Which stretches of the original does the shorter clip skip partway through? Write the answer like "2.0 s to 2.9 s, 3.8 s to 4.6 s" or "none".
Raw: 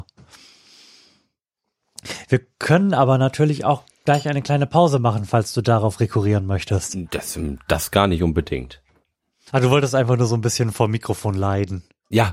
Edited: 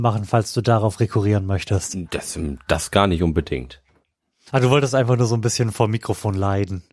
none